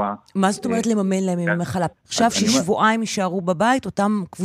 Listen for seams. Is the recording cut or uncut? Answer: cut